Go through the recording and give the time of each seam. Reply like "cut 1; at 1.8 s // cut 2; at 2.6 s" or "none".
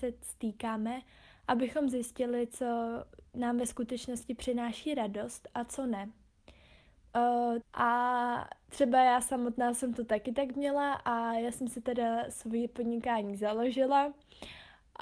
cut 1; at 7.6 s